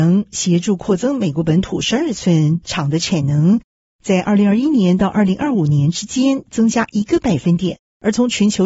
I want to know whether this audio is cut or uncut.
uncut